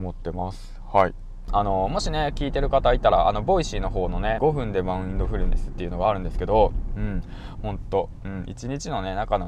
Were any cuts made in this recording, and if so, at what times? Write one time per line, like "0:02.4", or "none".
0:01.5
0:04.4
0:07.6